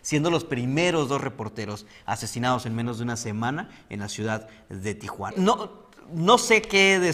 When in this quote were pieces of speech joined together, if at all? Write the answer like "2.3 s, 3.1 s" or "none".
5.3 s